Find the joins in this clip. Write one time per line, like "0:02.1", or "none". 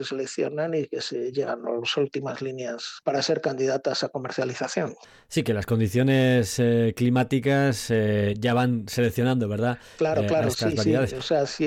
0:03.0